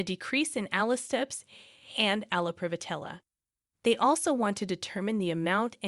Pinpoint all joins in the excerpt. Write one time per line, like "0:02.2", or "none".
0:03.7